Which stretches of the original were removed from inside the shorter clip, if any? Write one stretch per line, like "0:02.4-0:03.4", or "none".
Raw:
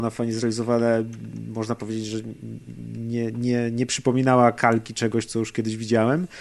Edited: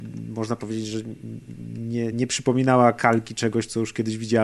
0:03.3-0:03.7